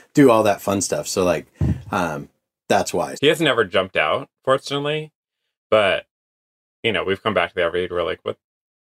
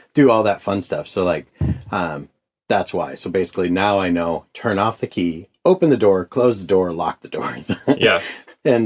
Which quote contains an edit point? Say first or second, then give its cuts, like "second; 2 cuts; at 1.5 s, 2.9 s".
first; 1 cut; at 3.2 s